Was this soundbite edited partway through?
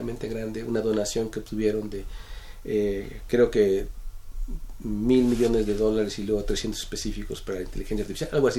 no; 0 cuts

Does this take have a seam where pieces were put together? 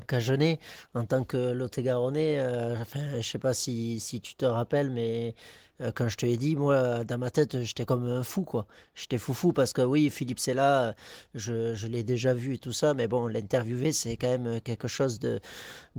no; 0 cuts

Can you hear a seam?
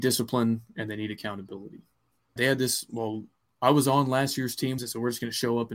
yes; 2 cuts; at 2.4 s, 4.8 s

